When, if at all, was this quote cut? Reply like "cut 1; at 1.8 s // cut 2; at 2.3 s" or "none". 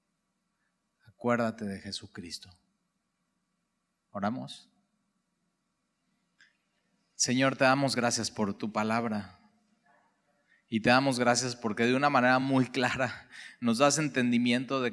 none